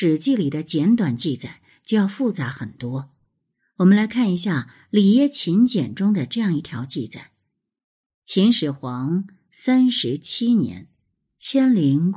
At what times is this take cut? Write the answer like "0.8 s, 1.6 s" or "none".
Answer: none